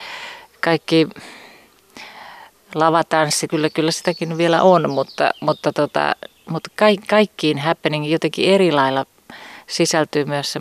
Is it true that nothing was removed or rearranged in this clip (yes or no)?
no